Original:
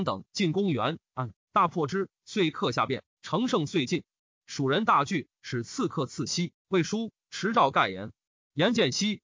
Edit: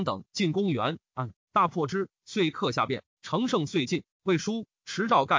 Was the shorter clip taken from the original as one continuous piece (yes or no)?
no